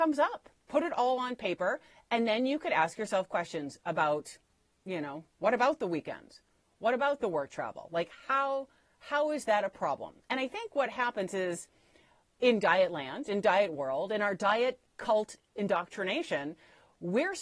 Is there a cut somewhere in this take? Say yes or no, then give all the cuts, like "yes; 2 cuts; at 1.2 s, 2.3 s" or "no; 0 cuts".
no; 0 cuts